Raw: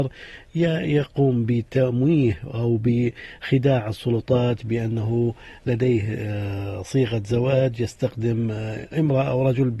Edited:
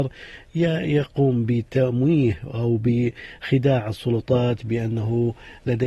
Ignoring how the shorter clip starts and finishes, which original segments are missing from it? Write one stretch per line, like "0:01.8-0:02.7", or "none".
none